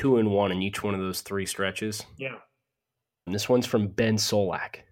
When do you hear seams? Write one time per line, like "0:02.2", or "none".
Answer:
0:03.3